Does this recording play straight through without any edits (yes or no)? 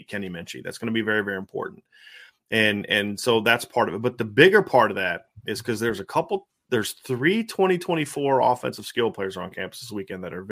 yes